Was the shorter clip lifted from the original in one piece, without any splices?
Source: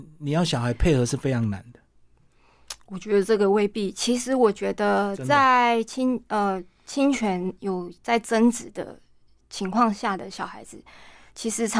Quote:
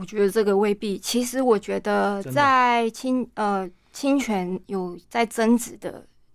yes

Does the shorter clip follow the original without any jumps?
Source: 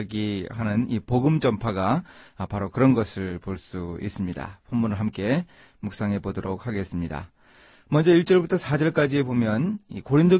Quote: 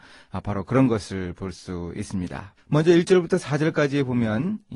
no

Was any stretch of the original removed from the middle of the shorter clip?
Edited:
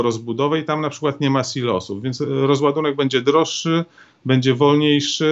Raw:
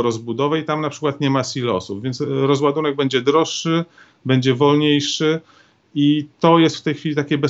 no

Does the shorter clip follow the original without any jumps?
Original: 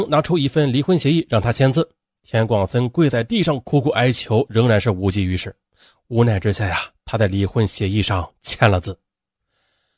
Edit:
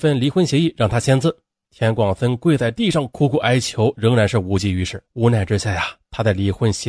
no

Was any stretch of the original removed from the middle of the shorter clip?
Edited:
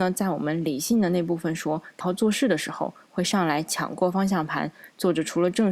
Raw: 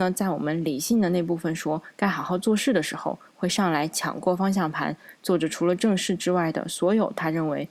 yes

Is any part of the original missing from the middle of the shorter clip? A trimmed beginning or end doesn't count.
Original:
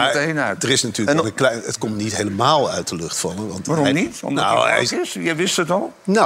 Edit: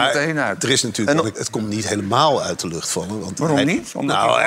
yes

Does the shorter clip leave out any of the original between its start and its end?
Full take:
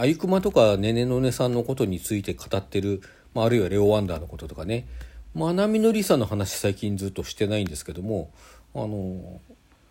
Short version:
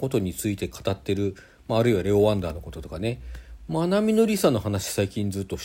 no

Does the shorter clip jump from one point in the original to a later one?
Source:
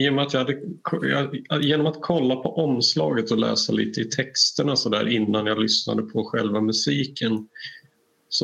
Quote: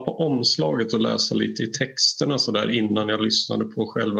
no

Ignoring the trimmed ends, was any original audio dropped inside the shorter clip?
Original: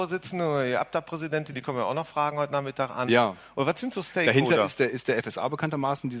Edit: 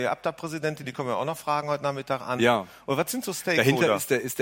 no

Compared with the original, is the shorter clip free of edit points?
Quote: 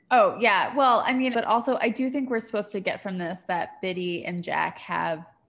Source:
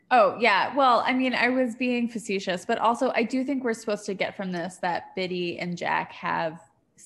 no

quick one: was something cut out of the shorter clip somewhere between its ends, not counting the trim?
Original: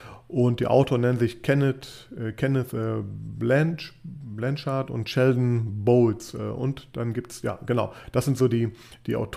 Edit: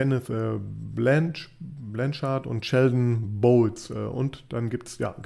no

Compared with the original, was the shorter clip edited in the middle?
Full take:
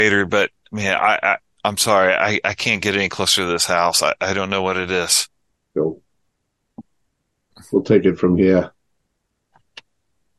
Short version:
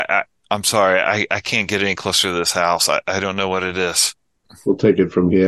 yes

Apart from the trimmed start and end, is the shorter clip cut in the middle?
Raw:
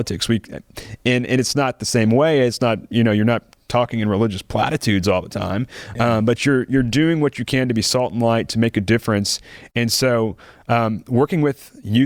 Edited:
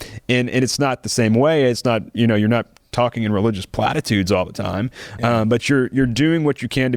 no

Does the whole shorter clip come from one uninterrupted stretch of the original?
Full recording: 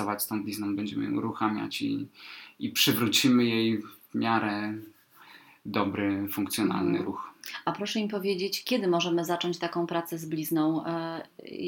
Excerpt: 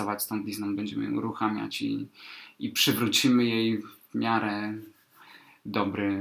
yes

